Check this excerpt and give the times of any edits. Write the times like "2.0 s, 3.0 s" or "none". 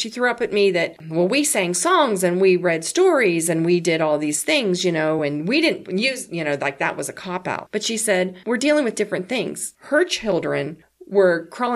none